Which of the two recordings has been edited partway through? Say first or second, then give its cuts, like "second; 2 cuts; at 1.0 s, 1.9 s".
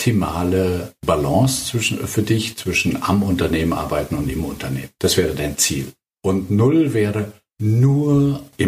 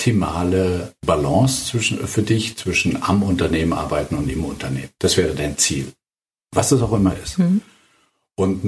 first; 1 cut; at 6.2 s